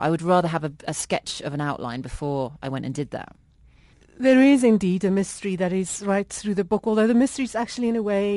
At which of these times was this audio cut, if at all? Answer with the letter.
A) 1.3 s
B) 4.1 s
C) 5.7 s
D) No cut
D